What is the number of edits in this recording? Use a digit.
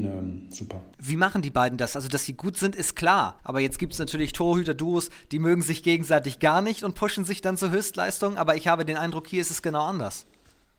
1